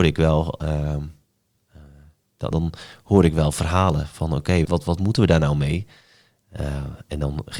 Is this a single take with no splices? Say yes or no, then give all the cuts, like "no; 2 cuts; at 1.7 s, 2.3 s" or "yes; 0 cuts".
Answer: no; 2 cuts; at 2.5 s, 4.6 s